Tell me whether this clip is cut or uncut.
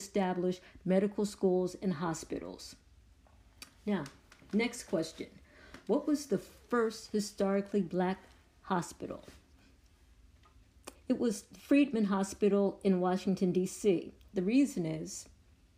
cut